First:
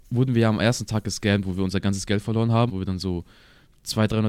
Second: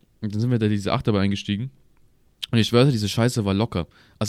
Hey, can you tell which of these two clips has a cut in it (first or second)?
first